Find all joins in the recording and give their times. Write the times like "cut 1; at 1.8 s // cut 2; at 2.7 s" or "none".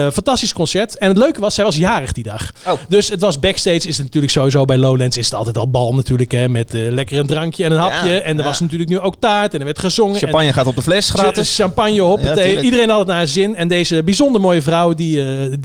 none